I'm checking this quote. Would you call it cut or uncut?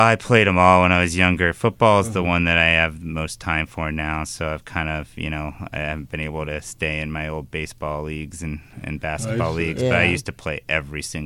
uncut